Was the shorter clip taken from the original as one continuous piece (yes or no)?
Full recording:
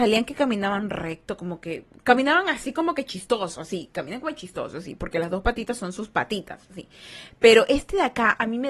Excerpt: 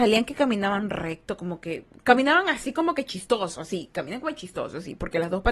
yes